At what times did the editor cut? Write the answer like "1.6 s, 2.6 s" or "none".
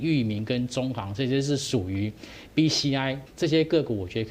3.3 s